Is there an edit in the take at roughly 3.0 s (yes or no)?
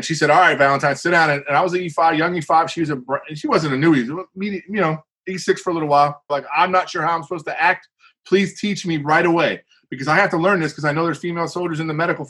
no